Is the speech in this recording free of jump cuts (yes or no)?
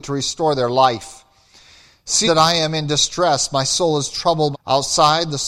no